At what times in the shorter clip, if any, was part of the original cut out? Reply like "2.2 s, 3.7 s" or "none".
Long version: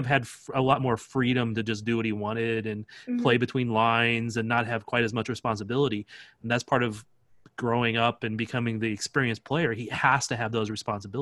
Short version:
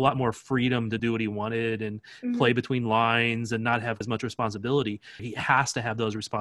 1.0 s, 4.0 s, 5.2 s